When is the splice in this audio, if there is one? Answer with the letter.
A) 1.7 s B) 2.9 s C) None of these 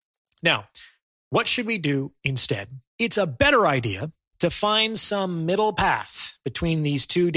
B